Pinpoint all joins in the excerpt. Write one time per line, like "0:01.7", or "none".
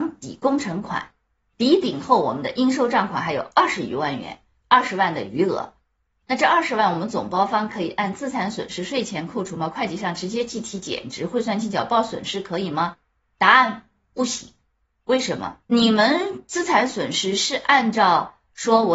0:15.6

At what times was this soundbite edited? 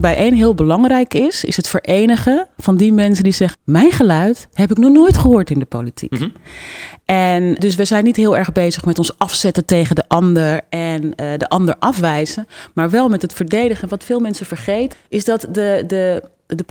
0:03.5
0:07.6
0:14.9

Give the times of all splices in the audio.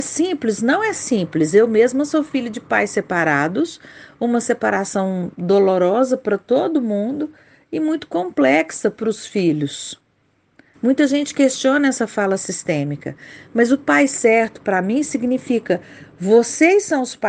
0:10.7

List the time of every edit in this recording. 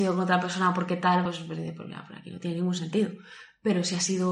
none

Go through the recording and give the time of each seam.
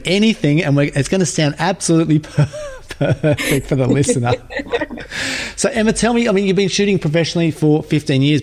none

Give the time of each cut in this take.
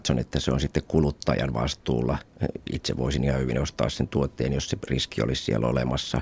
none

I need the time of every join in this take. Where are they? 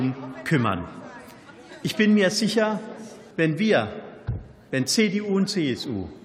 0:03.3

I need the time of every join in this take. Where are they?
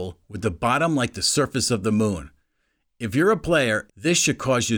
0:03.9

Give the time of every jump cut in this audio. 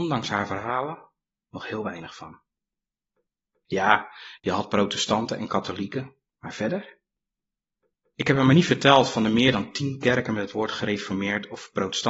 0:06.3

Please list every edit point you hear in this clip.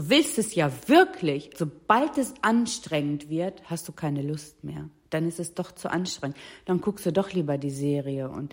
0:01.5

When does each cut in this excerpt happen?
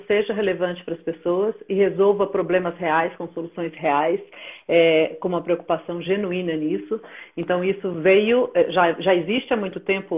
none

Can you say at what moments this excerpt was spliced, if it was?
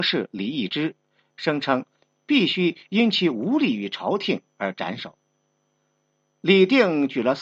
0:01.3

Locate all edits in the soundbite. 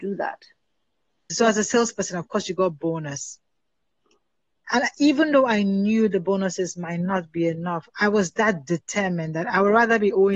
0:01.3

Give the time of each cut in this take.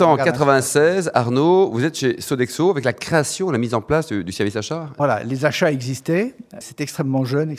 0:05.0
0:06.6

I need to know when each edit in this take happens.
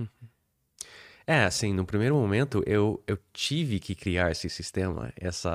none

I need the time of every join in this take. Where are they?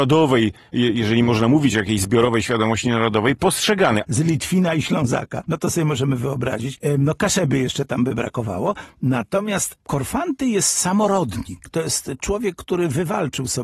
0:04.0

